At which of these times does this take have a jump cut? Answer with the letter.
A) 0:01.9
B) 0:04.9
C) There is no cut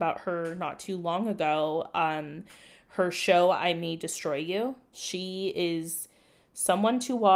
B